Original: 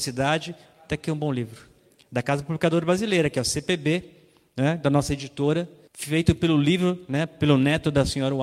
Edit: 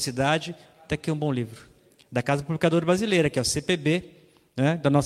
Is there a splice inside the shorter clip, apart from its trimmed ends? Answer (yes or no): no